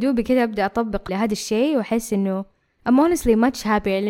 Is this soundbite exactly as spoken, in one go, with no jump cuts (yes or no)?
no